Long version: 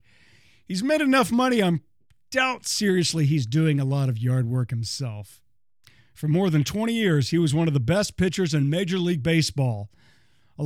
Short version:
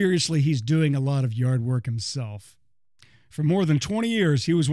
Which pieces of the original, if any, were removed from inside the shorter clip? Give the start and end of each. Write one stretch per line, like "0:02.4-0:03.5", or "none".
none